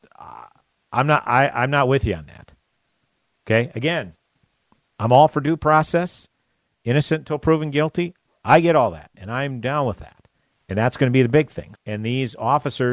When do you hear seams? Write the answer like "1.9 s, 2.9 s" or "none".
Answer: 10.5 s, 11.7 s